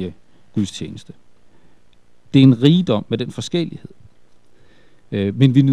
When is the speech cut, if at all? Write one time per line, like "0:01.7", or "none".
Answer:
none